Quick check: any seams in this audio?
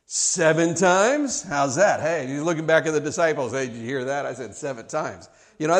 no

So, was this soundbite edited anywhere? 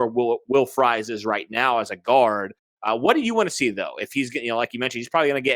no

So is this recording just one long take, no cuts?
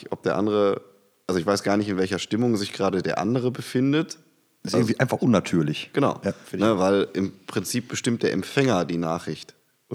yes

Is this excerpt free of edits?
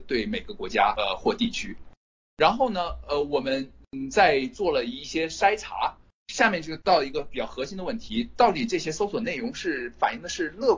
yes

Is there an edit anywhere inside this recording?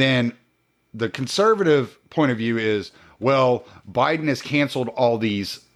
no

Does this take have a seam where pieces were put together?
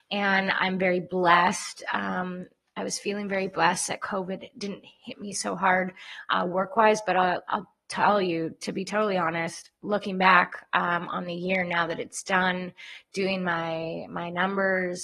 no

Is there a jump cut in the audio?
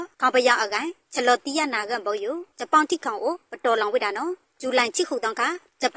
no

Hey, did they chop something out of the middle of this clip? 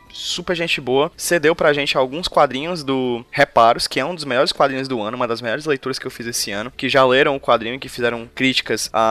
yes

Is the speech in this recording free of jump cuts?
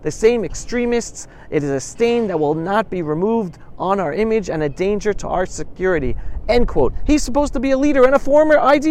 yes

